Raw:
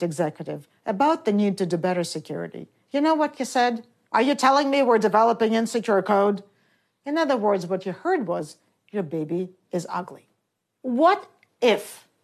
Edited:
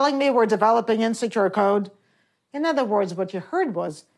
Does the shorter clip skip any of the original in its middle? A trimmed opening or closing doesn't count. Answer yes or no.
no